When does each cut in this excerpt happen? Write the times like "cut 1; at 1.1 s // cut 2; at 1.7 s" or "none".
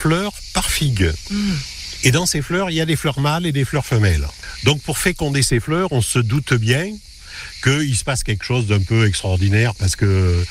none